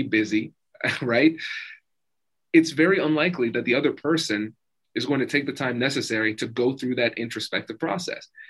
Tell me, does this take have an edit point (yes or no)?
no